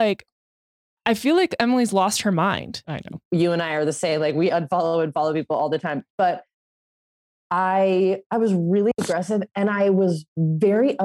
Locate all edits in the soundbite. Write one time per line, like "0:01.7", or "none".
0:02.8